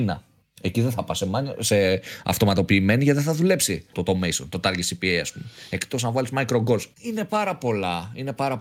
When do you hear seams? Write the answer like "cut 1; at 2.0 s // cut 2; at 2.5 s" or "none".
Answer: cut 1; at 3.9 s // cut 2; at 6.9 s

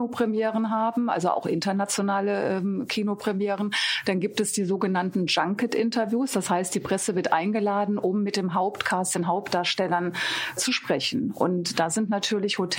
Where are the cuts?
none

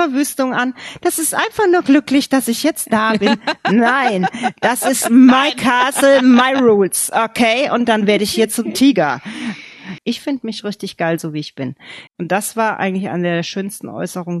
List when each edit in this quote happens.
cut 1; at 10.0 s // cut 2; at 12.1 s

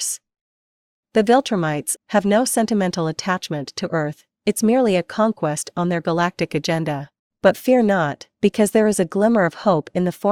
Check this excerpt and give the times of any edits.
cut 1; at 2.0 s

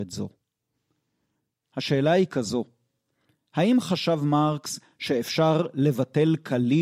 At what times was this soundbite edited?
none

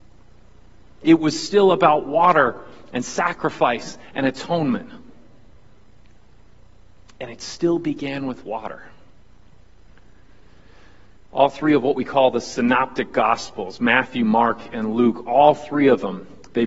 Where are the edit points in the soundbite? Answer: cut 1; at 1.0 s

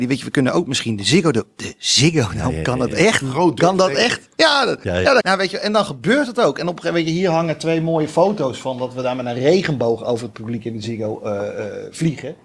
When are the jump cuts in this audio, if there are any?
cut 1; at 5.2 s

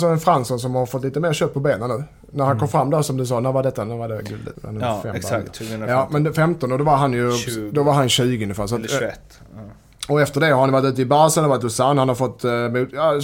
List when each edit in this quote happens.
none

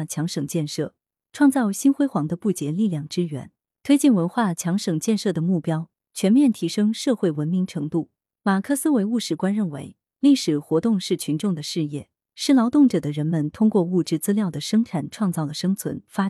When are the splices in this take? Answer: none

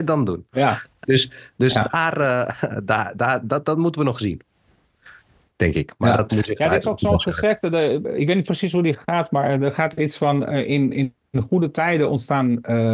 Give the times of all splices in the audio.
none

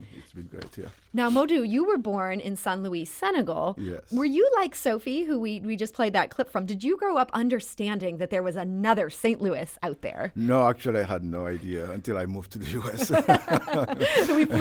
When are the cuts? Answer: none

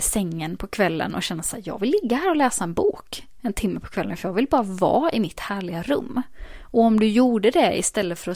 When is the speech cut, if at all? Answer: none

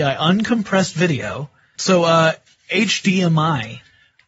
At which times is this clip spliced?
cut 1; at 1.7 s

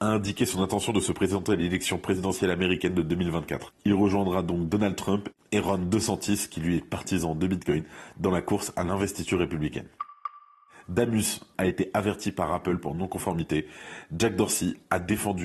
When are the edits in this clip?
cut 1; at 11.5 s

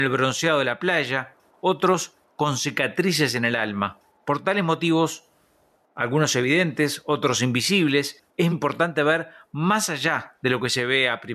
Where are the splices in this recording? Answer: cut 1; at 8.5 s

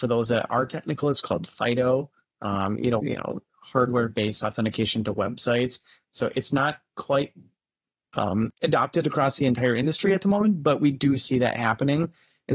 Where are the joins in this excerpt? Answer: cut 1; at 3.0 s

